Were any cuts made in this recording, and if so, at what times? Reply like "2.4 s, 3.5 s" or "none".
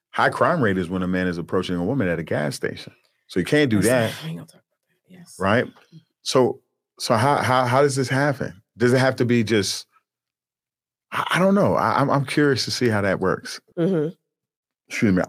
13.7 s